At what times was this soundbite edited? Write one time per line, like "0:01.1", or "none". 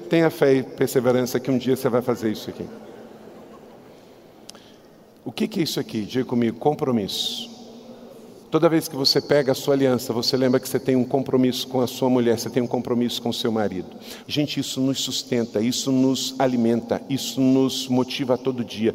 0:08.4
0:14.2